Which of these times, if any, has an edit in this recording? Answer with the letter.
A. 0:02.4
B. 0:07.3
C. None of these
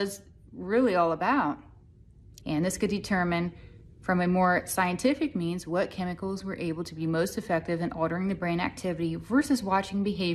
A